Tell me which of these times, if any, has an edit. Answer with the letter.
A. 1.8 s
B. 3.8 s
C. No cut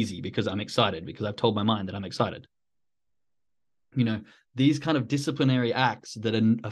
B